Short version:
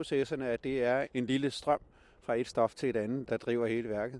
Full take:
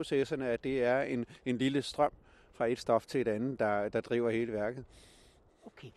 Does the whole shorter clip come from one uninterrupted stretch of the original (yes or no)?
no